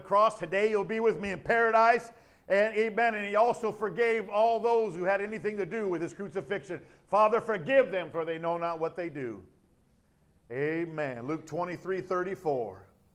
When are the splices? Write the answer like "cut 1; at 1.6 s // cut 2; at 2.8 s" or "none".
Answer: none